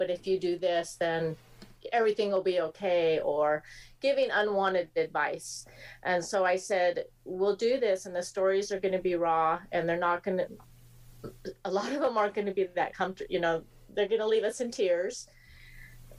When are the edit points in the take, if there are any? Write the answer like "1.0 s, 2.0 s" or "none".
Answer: none